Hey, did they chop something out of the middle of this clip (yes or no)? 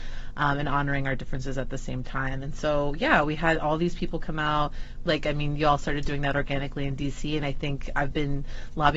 yes